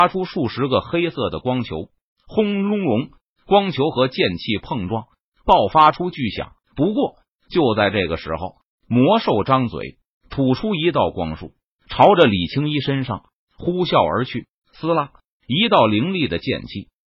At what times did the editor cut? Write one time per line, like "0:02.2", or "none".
0:06.6
0:14.5